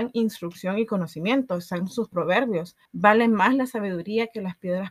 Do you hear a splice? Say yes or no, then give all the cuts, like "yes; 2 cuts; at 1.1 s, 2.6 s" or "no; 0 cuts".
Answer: yes; 1 cut; at 2.9 s